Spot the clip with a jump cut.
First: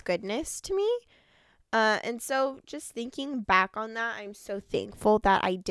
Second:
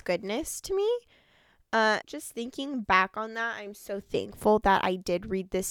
second; 1 cut; at 2.0 s

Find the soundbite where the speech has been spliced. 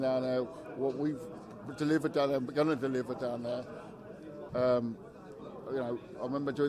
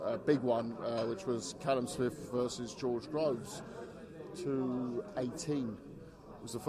first; 1 cut; at 4.5 s

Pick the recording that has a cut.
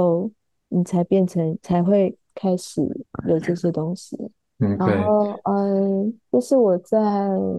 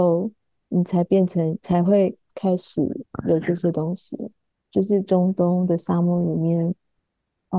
second; 1 cut; at 4.5 s

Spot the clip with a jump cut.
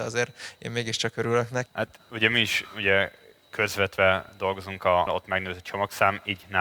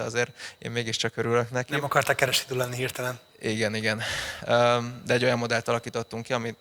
first; 2 cuts; at 1.7 s, 5.1 s

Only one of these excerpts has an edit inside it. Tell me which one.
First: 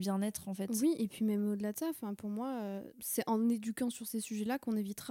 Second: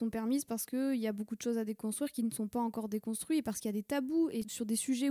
first; 1 cut; at 2.9 s

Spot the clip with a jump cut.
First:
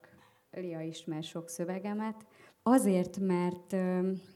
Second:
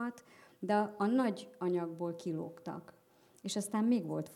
first; 1 cut; at 2.5 s

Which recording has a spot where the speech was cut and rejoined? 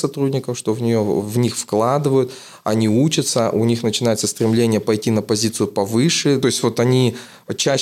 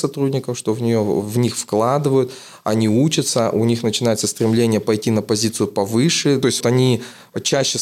second; 1 cut; at 6.6 s

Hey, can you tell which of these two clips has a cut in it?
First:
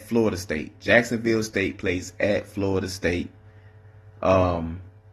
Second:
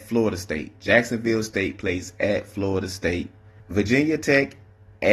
second; 1 cut; at 3.6 s

